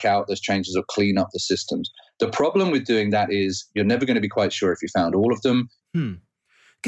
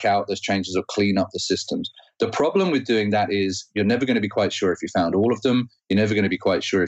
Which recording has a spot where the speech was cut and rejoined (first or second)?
first